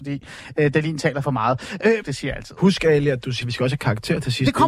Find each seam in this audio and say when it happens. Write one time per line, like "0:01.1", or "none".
0:02.0
0:03.4